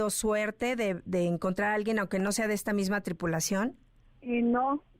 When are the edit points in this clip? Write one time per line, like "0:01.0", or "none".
none